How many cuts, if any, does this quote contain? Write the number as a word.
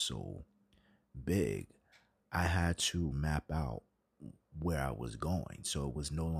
one